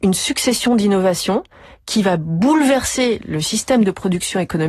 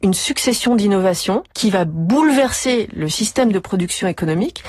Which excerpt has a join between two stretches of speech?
second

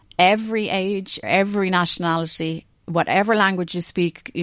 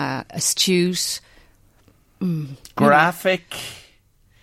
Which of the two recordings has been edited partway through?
first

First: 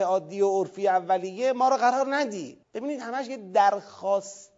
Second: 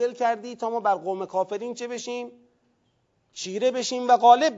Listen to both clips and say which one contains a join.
first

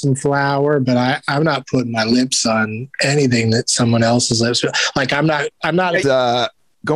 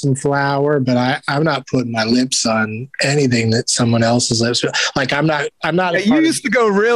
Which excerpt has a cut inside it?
first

